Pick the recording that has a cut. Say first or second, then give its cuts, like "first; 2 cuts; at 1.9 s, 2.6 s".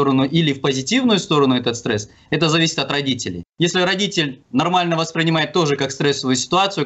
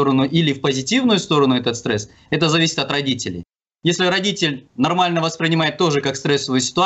first; 1 cut; at 3.5 s